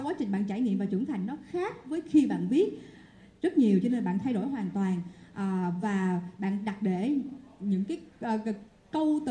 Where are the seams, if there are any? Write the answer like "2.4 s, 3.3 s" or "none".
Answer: none